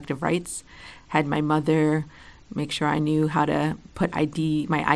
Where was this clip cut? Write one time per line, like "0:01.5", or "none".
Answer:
none